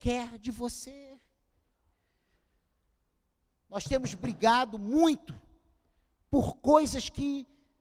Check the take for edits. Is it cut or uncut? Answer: uncut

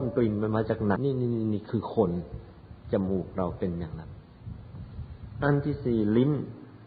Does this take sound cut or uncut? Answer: cut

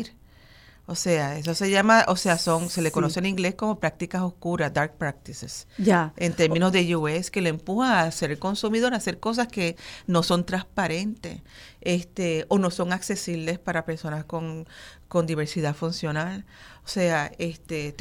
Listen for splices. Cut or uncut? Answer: uncut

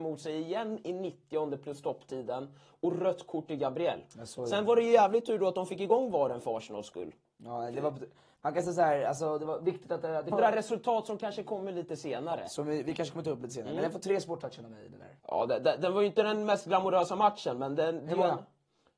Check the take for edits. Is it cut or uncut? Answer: cut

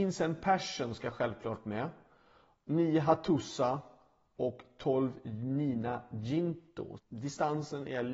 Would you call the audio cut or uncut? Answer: cut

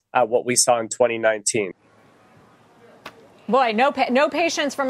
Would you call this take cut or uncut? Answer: uncut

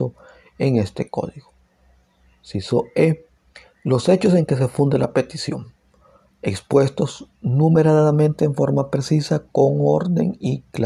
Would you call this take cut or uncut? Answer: uncut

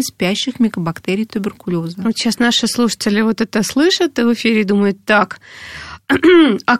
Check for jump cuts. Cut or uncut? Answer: uncut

